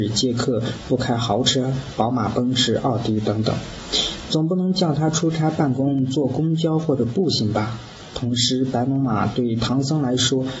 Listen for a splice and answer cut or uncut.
uncut